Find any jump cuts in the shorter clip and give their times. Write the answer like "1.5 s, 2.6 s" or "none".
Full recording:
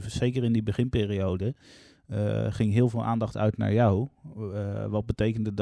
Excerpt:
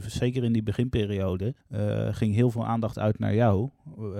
1.6 s